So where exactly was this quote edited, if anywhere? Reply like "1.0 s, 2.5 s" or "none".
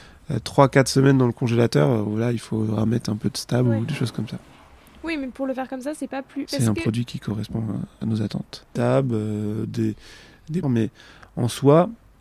6.5 s, 8.8 s, 10.6 s